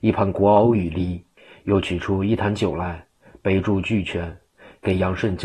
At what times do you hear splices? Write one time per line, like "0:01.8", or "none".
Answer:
none